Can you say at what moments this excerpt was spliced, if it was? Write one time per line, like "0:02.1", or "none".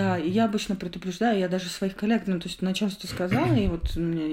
none